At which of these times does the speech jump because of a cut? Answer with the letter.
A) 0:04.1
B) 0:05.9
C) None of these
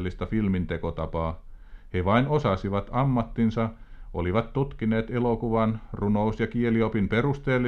C